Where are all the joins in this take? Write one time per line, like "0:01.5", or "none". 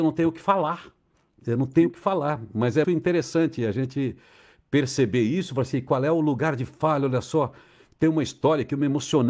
0:02.8